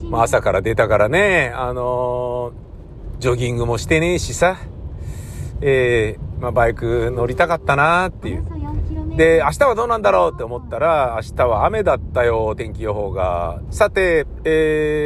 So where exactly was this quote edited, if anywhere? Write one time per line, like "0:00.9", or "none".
0:13.7